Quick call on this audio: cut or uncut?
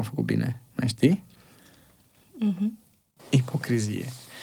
cut